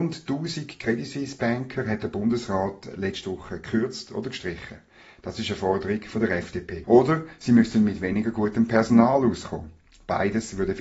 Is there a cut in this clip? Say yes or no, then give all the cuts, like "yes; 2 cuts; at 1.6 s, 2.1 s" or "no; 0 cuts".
yes; 1 cut; at 6.8 s